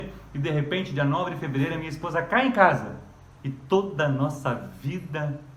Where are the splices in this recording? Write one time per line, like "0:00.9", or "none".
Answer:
0:03.4